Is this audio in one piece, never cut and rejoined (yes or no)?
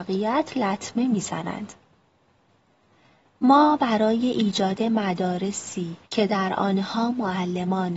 no